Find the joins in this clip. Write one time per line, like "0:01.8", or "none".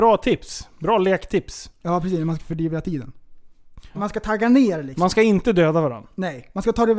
0:03.9